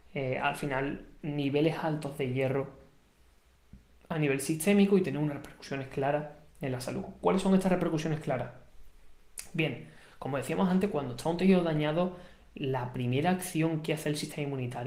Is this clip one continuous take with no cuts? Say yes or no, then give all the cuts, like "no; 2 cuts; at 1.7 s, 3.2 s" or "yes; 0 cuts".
yes; 0 cuts